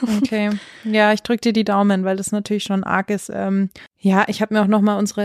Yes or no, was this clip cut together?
yes